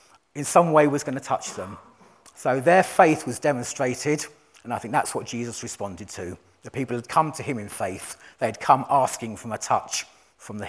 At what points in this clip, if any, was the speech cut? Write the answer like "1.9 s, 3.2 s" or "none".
none